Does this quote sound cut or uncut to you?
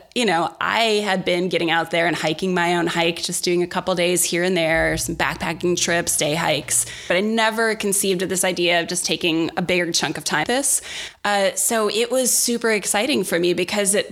cut